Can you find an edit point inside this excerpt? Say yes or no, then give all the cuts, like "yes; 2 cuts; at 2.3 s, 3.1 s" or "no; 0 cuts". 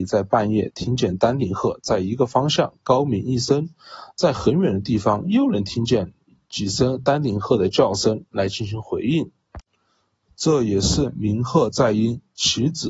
no; 0 cuts